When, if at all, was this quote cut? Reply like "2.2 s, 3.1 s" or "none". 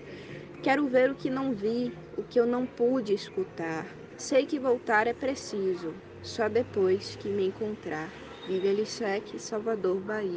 4.1 s